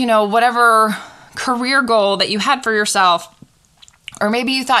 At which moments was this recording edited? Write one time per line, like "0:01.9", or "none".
none